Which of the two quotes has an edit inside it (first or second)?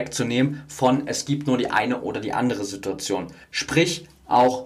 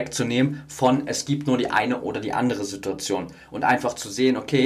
first